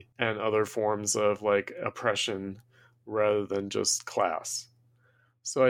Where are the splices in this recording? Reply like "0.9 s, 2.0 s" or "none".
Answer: none